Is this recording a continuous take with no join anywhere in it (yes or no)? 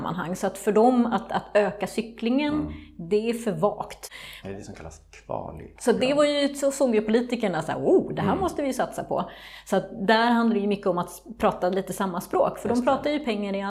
no